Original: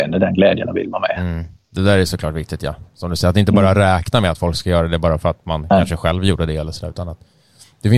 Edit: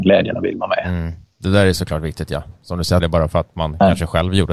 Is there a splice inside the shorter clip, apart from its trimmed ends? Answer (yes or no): yes